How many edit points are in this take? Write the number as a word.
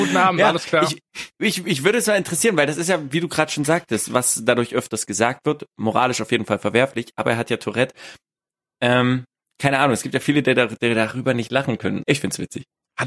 one